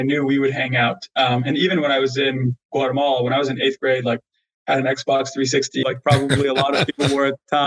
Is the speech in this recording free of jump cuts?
no; 1 cut; at 5.8 s

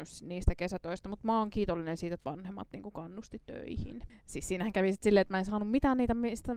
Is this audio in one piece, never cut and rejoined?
no; 1 cut; at 4.1 s

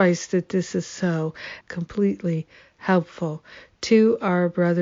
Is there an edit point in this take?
yes; 1 cut; at 1.6 s

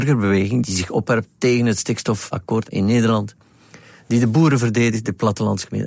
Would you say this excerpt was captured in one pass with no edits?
yes; 0 cuts

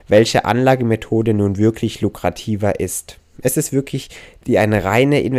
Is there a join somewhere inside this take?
no; 0 cuts

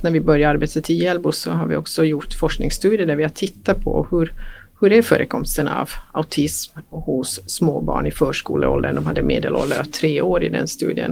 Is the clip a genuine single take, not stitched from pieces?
yes; 0 cuts

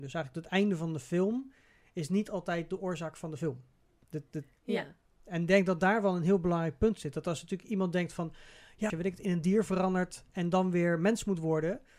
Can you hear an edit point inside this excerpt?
yes; 1 cut; at 8.9 s

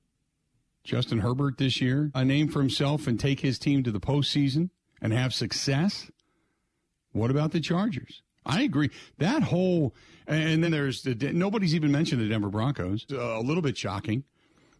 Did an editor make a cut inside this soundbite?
yes; 3 cuts; at 2.1 s, 10.7 s, 13.1 s

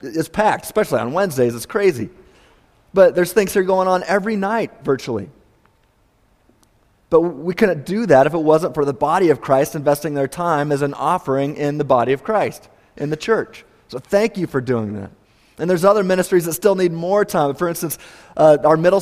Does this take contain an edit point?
no; 0 cuts

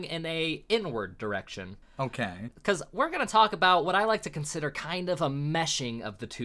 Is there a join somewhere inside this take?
no; 0 cuts

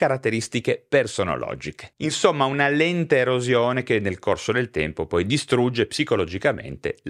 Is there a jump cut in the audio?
yes; 1 cut; at 2.0 s

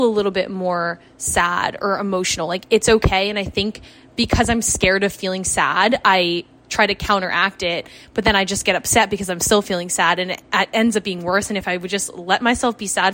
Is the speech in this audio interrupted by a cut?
no; 0 cuts

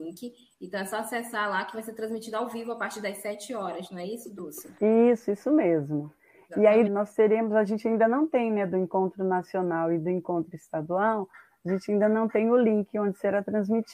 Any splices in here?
yes; 1 cut; at 6.9 s

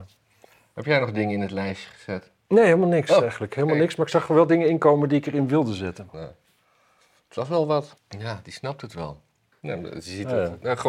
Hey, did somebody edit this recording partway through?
yes; 3 cuts; at 6.1 s, 8.0 s, 9.5 s

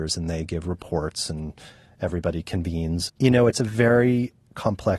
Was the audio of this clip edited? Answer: yes; 1 cut; at 3.1 s

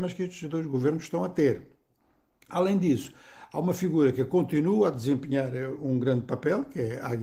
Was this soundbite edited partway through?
no; 0 cuts

